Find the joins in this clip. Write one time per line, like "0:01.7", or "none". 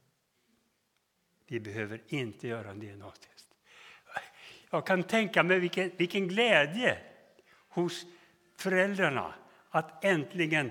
0:06.0